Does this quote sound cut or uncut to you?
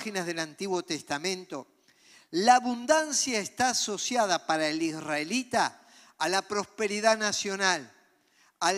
uncut